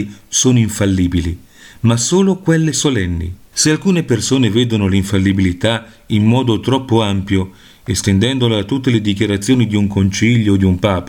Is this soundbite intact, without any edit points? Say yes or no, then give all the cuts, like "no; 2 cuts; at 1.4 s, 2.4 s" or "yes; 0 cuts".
no; 1 cut; at 3.5 s